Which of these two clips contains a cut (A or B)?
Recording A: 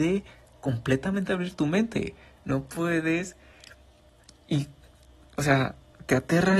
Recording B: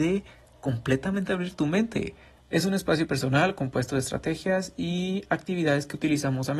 B